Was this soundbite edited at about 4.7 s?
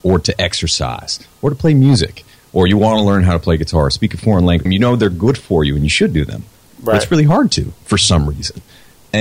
yes; 1 cut; at 4.7 s

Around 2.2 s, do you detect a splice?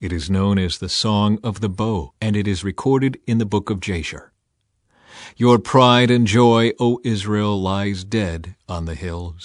yes; 1 cut; at 2.2 s

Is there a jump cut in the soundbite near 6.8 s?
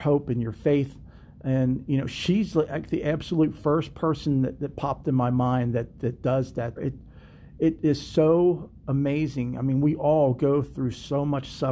yes; 1 cut; at 6.8 s

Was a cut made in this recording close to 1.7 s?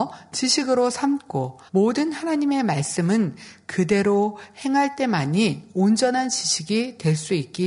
yes; 1 cut; at 1.7 s

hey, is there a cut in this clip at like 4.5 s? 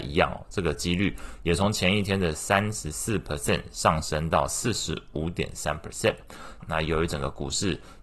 no; 1 cut; at 6.6 s

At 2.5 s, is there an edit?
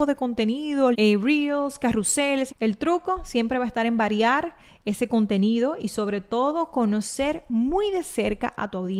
yes; 2 cuts; at 0.9 s, 2.5 s

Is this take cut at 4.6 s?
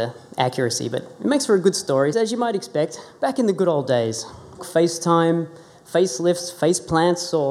yes; 2 cuts; at 2.1 s, 4.6 s

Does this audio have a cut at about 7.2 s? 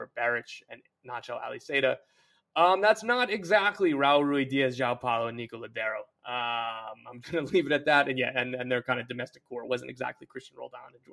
yes; 1 cut; at 7.2 s

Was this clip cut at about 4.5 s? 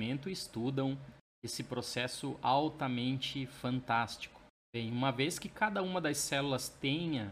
no; 0 cuts

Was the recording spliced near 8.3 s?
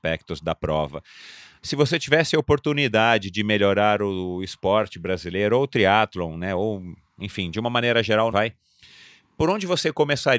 yes; 2 cuts; at 1.6 s, 8.3 s

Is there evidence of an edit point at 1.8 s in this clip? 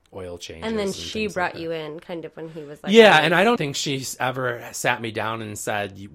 no; 1 cut; at 3.6 s

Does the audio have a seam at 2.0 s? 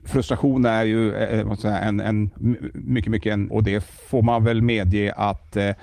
no; 1 cut; at 3.5 s

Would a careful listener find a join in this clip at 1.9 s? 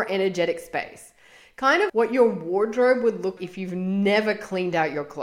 yes; 2 cuts; at 1.9 s, 3.4 s

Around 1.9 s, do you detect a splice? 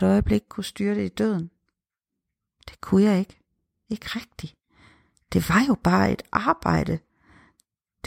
no; 0 cuts

